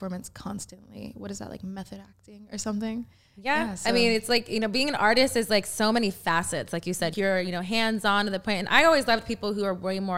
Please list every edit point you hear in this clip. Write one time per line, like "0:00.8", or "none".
0:07.1